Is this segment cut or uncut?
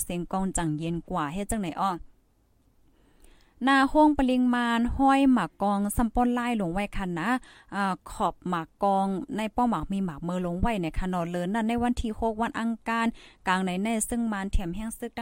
uncut